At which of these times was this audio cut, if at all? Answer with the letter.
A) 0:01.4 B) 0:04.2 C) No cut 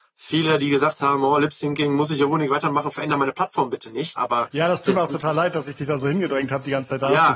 B